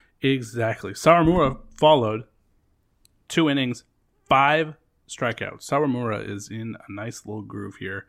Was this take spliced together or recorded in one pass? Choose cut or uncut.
uncut